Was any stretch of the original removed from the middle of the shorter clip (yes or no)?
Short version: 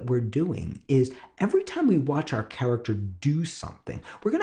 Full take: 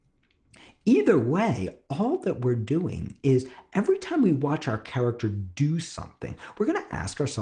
no